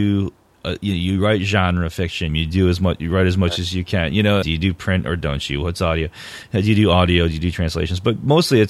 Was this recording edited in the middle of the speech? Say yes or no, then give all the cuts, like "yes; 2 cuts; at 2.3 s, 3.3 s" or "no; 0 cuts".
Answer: yes; 2 cuts; at 2.3 s, 4.4 s